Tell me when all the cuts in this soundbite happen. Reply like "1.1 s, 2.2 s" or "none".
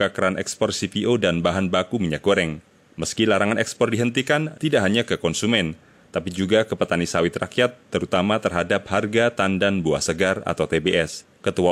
4.5 s